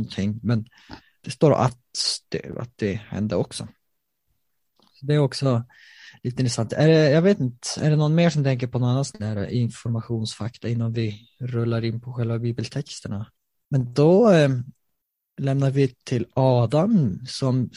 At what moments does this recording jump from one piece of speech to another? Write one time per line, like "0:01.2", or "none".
none